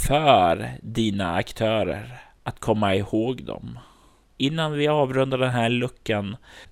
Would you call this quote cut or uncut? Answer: uncut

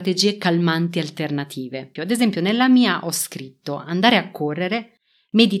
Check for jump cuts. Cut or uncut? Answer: cut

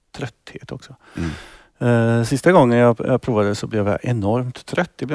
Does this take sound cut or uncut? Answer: uncut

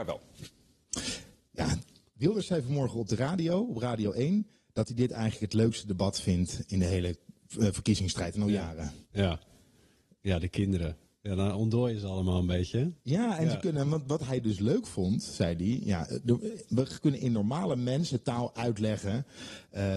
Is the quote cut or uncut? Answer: uncut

